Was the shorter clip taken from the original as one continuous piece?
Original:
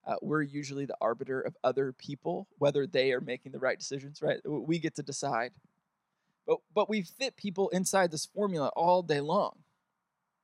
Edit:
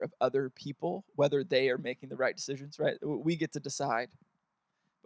yes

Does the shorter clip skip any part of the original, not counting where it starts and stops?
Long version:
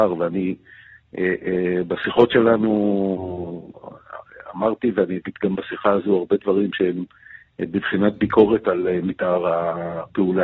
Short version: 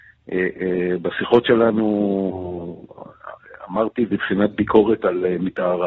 yes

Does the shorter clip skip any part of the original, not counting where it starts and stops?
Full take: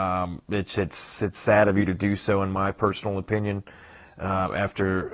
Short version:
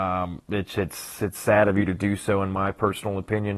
no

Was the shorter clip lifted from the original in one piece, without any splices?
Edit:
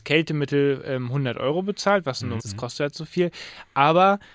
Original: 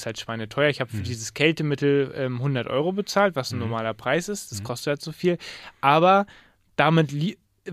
no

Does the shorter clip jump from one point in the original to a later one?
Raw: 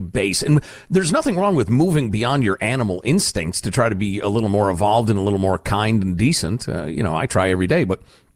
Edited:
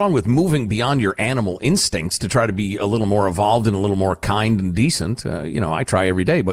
no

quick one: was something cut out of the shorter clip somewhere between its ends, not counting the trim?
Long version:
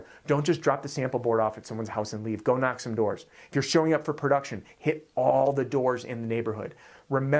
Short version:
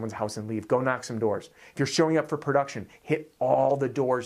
no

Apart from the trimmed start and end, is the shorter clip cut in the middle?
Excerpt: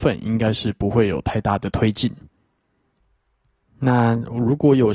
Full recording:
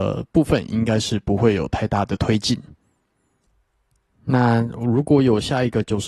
no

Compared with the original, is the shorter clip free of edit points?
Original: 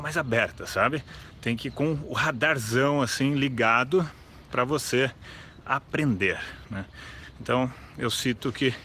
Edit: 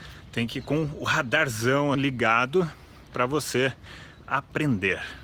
no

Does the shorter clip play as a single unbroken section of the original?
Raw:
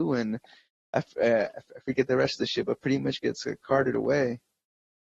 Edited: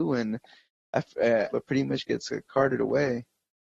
no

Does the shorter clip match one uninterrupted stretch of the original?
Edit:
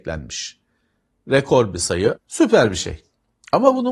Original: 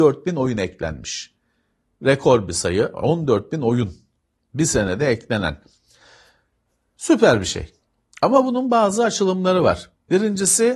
no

